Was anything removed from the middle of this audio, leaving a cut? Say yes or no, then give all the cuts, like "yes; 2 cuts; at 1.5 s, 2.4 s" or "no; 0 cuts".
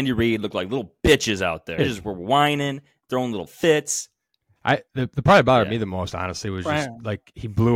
yes; 1 cut; at 1.8 s